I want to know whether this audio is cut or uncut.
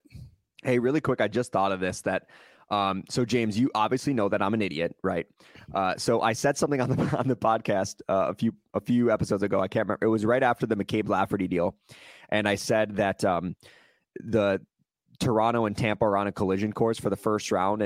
uncut